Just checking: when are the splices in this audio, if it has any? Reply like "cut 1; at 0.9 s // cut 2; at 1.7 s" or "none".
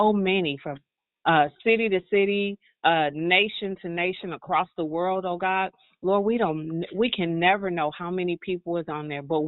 none